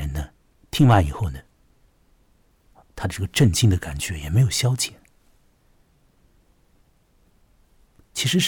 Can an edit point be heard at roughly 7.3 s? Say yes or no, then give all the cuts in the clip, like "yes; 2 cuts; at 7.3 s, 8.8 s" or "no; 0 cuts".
yes; 1 cut; at 7.3 s